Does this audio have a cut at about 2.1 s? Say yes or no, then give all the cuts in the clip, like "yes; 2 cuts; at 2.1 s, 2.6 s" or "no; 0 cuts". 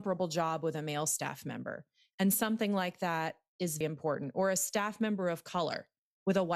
no; 1 cut; at 3.8 s